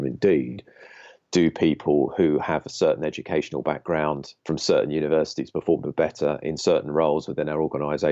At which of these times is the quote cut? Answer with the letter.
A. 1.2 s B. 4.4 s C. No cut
B